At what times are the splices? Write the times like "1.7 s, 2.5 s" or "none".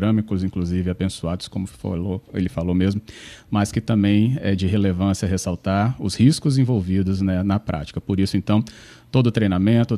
none